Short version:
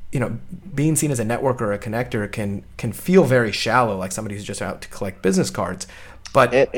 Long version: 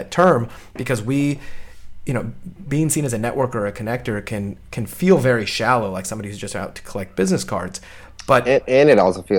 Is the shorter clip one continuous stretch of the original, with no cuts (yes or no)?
yes